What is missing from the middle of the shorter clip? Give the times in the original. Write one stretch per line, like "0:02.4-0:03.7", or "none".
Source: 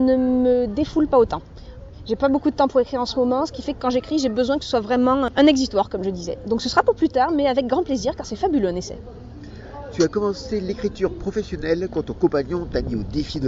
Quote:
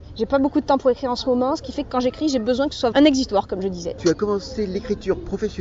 0:04.8-0:05.3
0:06.4-0:09.9